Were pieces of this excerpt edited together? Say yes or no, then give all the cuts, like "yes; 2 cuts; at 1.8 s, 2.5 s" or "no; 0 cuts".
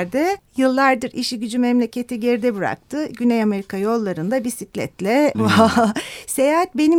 yes; 1 cut; at 5.3 s